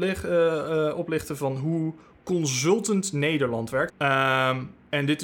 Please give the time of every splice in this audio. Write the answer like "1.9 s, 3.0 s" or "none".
3.9 s